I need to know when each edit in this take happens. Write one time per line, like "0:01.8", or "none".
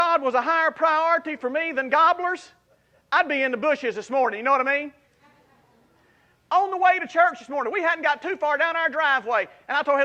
none